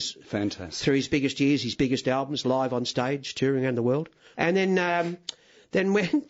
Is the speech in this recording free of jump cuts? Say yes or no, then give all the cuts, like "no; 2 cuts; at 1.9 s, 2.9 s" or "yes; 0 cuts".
no; 1 cut; at 4.3 s